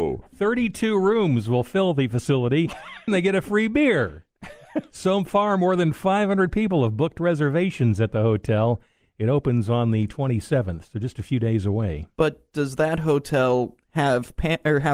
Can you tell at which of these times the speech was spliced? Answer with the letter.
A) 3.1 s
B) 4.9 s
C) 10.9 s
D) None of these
A